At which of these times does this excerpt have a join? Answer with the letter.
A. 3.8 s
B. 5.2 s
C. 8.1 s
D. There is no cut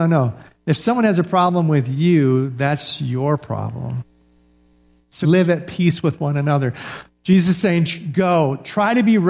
B